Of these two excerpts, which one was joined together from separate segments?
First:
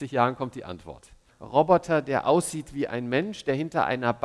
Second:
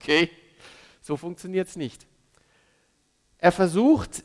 first; 1 cut; at 1.3 s

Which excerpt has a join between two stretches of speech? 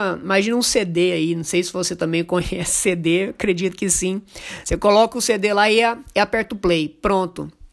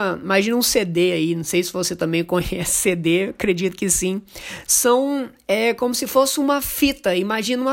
second; 1 cut; at 4.7 s

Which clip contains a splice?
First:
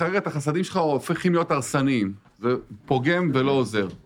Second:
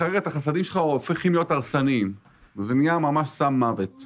first; 1 cut; at 2.3 s

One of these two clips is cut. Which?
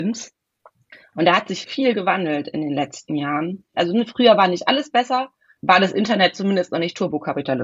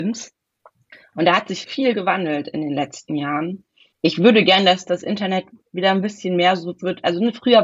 first; 2 cuts; at 3.7 s, 5.6 s

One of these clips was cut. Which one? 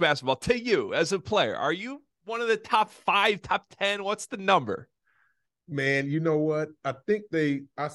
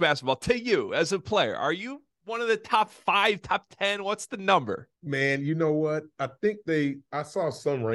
second; 1 cut; at 4.9 s

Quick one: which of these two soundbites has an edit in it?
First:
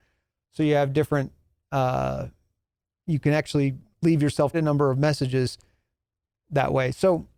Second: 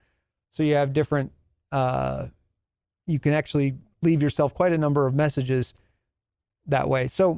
first; 1 cut; at 4.5 s

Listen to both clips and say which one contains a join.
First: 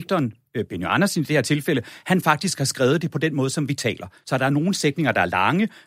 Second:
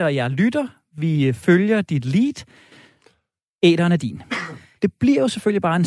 second; 1 cut; at 4.8 s

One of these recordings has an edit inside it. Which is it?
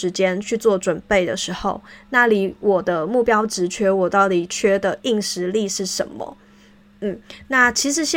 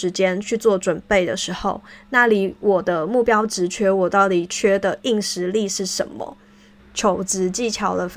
second; 1 cut; at 6.8 s

